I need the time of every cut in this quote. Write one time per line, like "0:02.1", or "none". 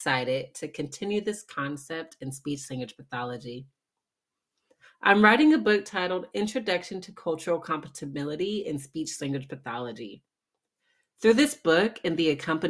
none